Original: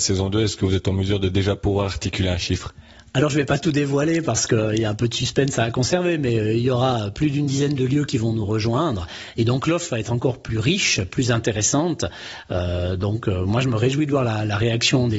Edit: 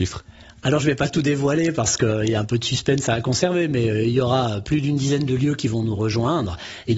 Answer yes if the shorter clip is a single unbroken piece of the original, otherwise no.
yes